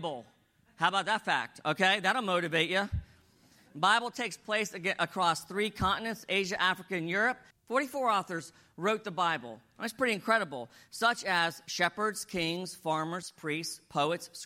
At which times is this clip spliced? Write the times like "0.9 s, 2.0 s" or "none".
7.5 s